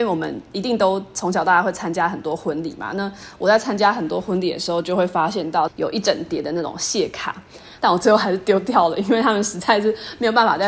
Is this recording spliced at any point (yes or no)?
yes